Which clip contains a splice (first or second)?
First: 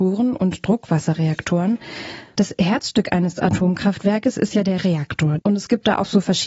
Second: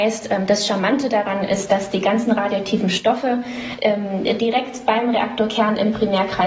first